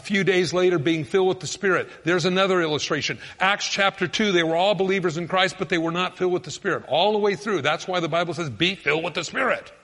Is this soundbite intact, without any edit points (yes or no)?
yes